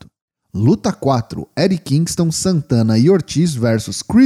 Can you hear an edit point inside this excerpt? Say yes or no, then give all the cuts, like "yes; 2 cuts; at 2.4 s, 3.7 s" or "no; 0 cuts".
no; 0 cuts